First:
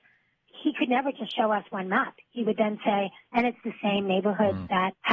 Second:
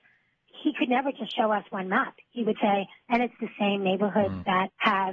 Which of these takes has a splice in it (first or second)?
second